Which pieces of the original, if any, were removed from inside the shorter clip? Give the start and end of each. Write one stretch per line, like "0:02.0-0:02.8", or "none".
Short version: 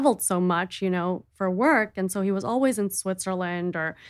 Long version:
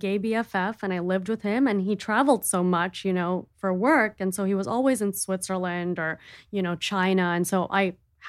none